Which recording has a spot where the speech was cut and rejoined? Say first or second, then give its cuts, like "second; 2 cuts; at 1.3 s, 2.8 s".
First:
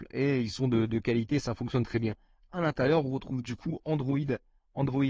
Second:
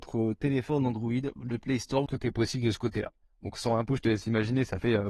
second; 2 cuts; at 2.1 s, 3.2 s